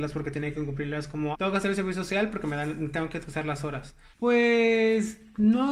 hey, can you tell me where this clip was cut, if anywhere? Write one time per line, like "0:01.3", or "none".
0:01.3
0:04.1